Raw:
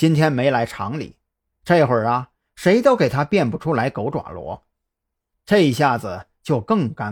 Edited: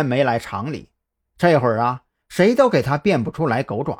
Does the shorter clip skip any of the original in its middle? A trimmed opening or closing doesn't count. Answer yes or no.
no